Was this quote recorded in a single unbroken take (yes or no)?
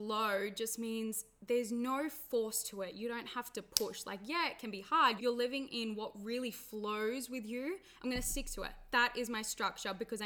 no